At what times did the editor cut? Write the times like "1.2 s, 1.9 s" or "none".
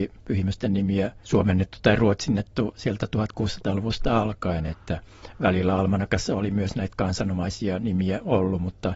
none